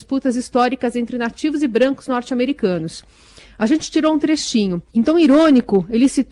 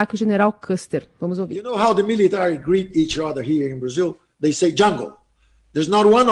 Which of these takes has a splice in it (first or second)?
first